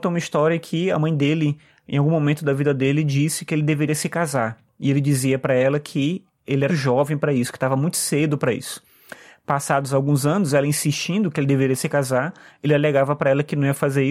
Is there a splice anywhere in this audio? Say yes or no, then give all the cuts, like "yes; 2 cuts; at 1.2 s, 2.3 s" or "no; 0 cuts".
yes; 1 cut; at 6.7 s